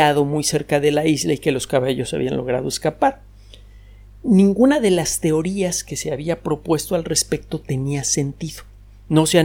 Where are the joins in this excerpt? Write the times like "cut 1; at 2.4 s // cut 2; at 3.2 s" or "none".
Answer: none